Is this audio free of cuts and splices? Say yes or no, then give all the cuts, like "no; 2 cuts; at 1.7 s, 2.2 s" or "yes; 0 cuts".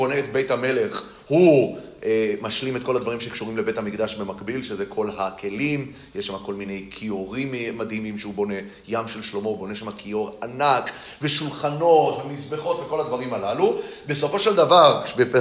yes; 0 cuts